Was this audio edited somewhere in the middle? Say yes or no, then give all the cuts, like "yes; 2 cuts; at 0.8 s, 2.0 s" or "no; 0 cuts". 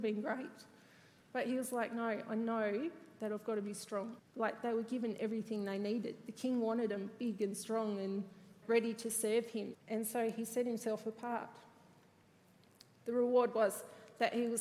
yes; 3 cuts; at 4.2 s, 8.6 s, 9.7 s